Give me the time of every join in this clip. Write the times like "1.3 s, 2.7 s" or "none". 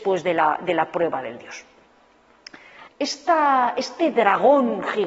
2.9 s